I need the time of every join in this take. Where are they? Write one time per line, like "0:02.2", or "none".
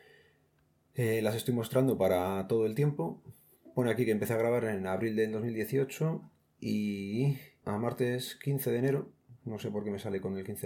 none